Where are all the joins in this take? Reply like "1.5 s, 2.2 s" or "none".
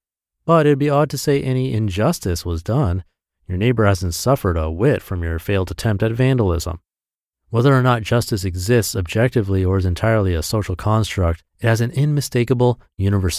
7.3 s, 11.5 s